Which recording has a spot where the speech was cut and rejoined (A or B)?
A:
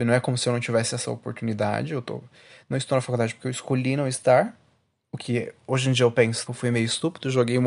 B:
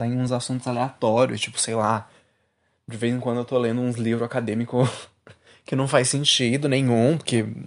A